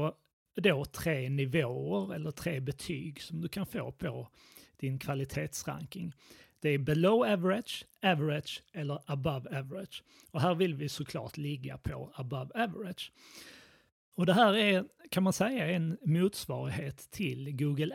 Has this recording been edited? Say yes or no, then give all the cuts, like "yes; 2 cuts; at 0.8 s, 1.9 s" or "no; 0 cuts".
yes; 1 cut; at 14.1 s